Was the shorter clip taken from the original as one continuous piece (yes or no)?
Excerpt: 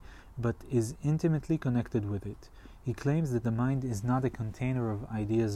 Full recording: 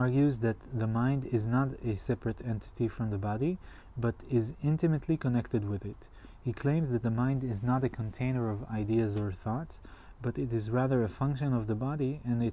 yes